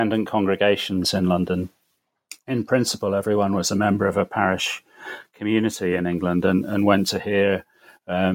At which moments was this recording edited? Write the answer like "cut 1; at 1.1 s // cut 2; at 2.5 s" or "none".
none